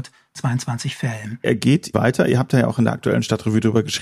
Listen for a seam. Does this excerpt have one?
yes; 1 cut; at 1.4 s

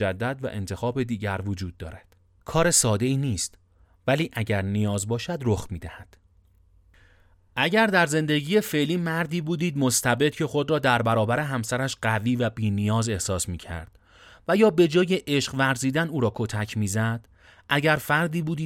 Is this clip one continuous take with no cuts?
no; 1 cut; at 2.4 s

